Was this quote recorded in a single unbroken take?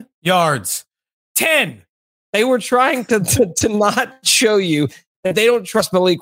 no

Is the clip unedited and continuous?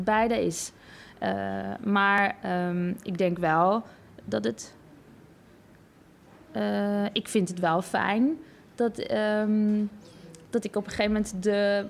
yes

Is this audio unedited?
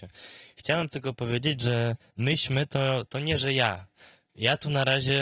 yes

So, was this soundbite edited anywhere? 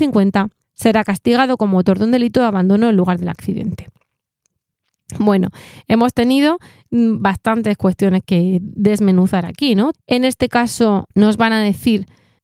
yes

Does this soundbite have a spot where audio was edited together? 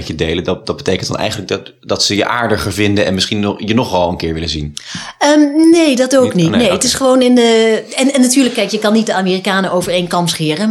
no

